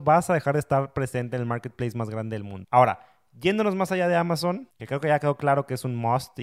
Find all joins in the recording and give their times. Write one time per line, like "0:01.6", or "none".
0:02.6